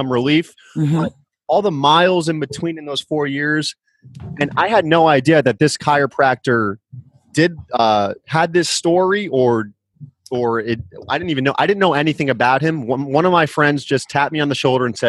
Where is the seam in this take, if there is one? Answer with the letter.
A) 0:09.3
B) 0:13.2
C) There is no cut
C